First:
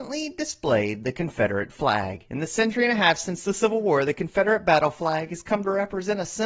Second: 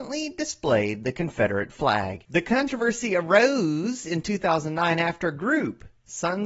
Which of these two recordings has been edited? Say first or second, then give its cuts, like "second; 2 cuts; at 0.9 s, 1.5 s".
second; 1 cut; at 2.2 s